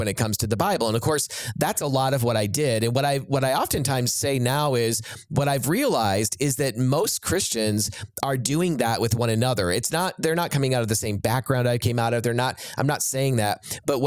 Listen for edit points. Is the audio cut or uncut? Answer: uncut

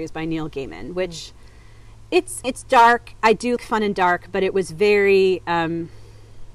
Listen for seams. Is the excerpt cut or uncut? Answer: cut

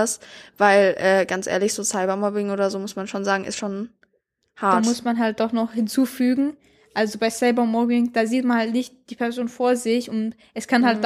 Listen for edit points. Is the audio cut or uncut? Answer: uncut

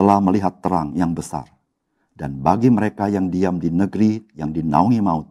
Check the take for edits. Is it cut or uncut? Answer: uncut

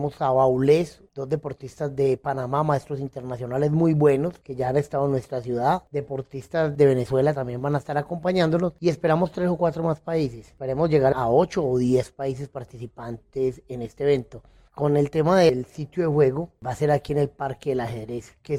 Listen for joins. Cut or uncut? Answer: uncut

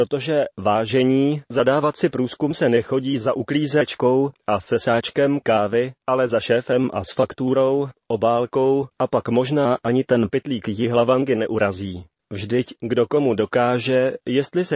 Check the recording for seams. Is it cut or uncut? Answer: cut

